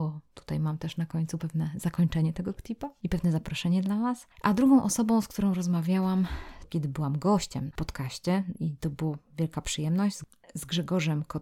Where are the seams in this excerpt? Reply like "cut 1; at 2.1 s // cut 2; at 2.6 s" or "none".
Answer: none